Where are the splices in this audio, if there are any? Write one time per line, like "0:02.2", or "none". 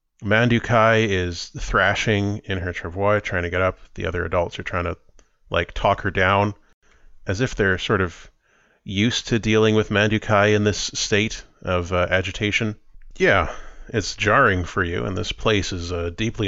0:13.1